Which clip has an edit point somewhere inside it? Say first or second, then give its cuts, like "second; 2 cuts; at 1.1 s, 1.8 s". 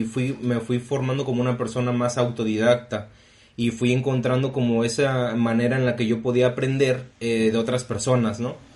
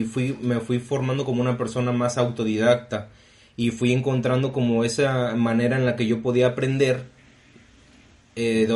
first; 1 cut; at 7.1 s